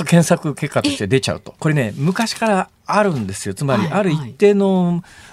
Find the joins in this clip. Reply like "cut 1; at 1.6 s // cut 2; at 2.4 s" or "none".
cut 1; at 1.6 s